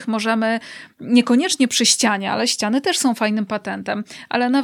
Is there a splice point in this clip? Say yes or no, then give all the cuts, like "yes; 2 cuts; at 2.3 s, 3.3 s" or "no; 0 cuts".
no; 0 cuts